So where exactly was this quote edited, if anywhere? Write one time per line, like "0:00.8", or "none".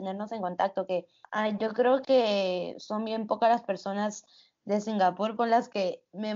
0:05.4